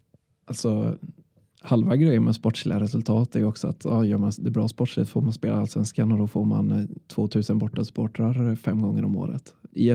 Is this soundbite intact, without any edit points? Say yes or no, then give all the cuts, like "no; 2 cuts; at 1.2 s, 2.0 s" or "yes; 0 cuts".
yes; 0 cuts